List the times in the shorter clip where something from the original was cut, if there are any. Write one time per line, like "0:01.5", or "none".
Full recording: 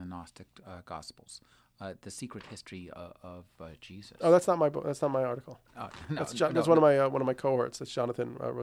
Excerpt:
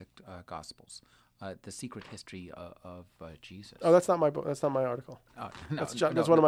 none